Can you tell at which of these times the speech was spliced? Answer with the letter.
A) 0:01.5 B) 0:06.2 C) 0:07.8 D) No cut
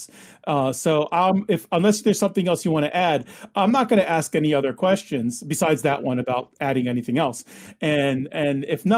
D